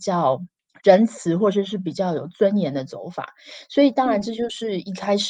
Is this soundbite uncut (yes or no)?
yes